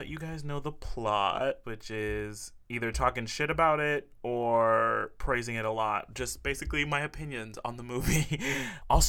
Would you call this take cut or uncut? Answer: cut